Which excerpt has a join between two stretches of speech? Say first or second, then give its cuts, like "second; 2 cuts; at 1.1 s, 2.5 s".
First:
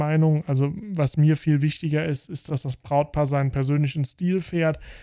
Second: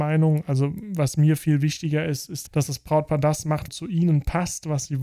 second; 2 cuts; at 2.5 s, 3.7 s